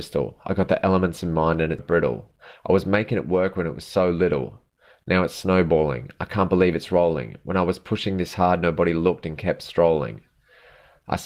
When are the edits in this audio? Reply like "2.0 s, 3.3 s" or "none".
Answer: 1.8 s